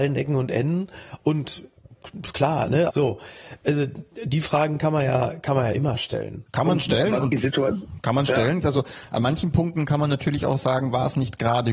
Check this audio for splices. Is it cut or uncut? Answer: cut